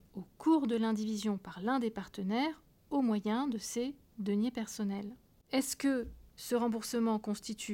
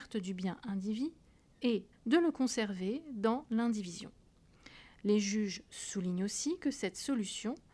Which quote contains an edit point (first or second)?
second